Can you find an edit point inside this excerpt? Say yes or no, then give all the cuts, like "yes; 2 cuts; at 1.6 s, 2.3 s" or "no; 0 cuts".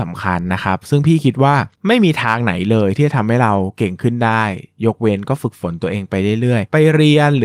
yes; 1 cut; at 1.7 s